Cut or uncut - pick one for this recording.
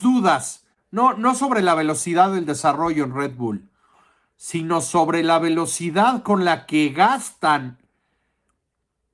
uncut